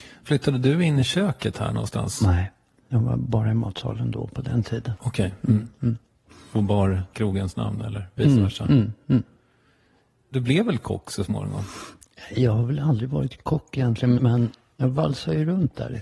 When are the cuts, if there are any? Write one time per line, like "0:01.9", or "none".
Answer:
0:14.2